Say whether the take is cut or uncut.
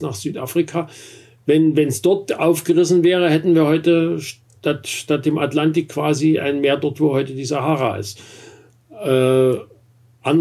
uncut